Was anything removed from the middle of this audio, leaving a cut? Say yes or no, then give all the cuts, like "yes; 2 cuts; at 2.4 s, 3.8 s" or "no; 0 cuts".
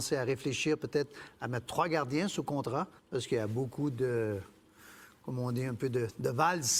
yes; 1 cut; at 3.0 s